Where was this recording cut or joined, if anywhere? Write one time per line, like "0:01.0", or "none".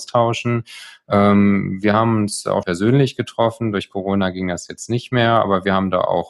0:02.6